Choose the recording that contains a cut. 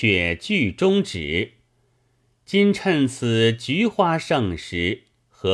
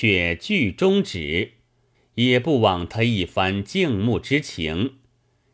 second; 1 cut; at 1.9 s

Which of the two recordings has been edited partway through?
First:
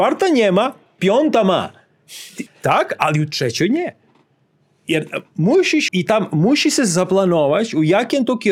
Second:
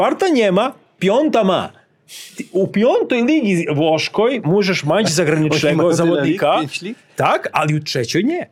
first; 2 cuts; at 2.5 s, 5.9 s

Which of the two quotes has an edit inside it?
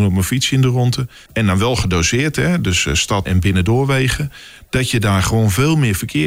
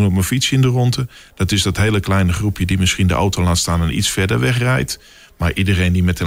first; 2 cuts; at 1.3 s, 3.3 s

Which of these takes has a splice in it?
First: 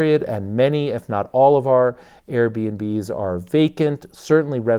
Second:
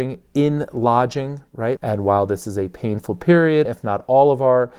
second; 2 cuts; at 1.8 s, 3.7 s

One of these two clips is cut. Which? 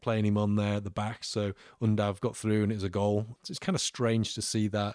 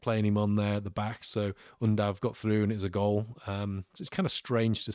first; 1 cut; at 3.4 s

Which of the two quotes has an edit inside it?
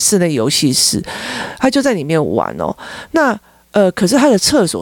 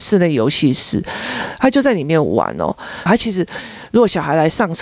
second; 1 cut; at 3.1 s

